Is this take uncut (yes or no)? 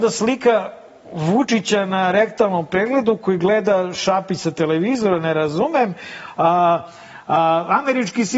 yes